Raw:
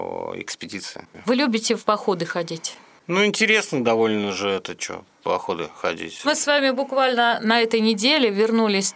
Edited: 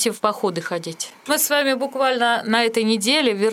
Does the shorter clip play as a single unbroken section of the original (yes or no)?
no